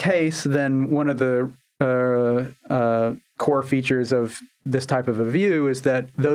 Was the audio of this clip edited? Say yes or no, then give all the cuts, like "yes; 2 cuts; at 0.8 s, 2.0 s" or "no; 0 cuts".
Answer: no; 0 cuts